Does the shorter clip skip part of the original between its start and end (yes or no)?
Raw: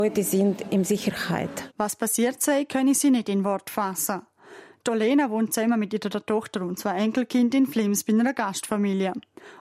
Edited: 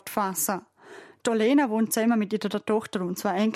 no